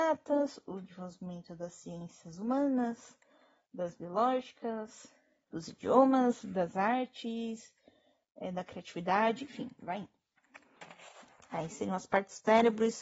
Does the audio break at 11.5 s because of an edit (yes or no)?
no